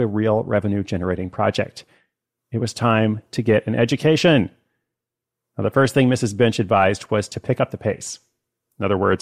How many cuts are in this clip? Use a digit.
0